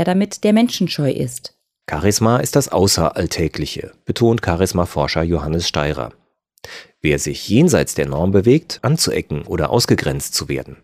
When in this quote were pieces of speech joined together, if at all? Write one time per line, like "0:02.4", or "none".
0:01.8
0:08.8